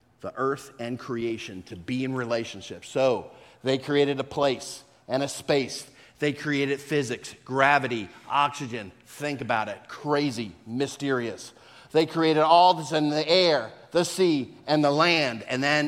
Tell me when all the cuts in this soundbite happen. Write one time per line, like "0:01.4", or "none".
none